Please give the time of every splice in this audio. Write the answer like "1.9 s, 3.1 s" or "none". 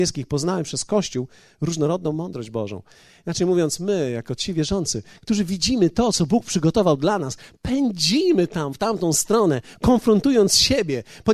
none